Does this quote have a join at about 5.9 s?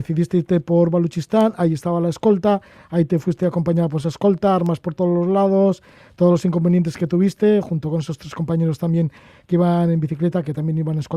no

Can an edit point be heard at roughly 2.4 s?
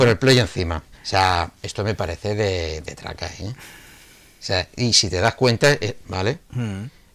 no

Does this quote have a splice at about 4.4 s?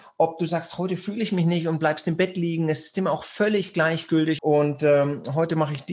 yes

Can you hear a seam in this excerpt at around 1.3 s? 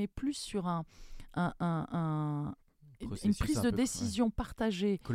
no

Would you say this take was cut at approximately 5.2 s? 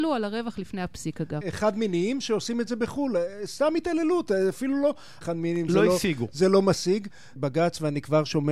yes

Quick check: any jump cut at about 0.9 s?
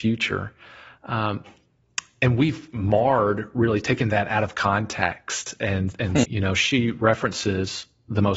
no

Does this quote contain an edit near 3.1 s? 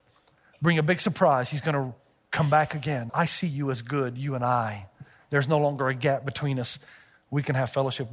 yes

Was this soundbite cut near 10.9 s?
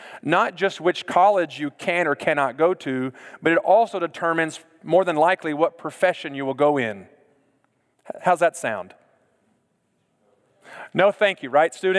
no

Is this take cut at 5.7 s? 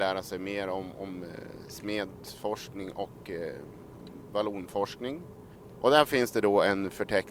yes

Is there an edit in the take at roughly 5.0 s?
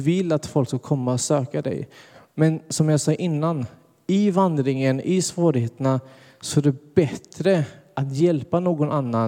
no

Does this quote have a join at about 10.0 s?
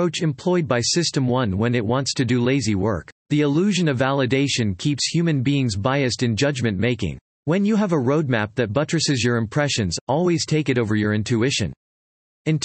no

